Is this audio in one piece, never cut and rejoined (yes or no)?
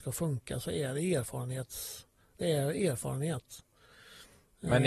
yes